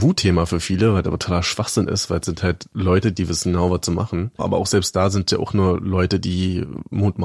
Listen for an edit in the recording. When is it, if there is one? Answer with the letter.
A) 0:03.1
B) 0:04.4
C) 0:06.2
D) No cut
B